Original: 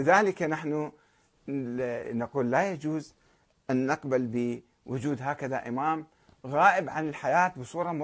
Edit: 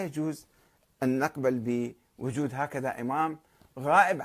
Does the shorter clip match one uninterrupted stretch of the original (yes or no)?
yes